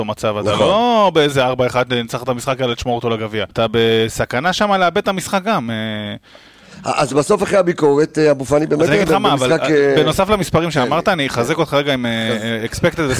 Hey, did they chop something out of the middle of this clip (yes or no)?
yes